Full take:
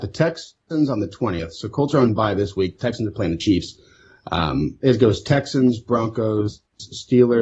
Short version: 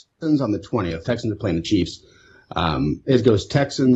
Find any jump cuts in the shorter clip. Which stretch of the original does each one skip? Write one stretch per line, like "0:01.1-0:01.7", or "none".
0:01.5-0:02.8